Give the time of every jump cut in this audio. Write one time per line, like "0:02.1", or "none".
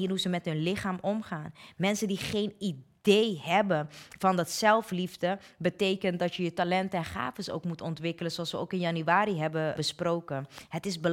0:09.8